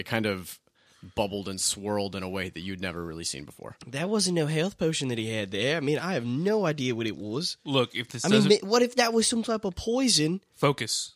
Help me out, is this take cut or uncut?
uncut